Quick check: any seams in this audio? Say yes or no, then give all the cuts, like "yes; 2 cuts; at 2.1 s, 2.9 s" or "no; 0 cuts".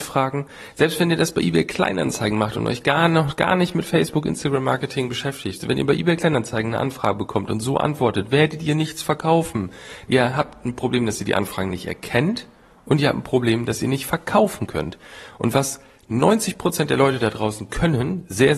yes; 1 cut; at 10.1 s